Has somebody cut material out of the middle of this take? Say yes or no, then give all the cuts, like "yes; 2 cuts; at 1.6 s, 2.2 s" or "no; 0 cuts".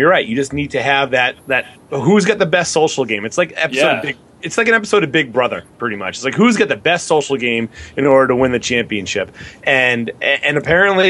no; 0 cuts